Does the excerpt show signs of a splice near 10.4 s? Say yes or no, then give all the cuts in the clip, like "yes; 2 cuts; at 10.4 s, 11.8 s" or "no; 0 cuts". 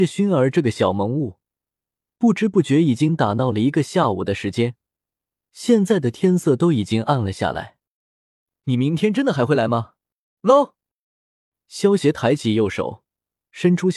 yes; 1 cut; at 10.4 s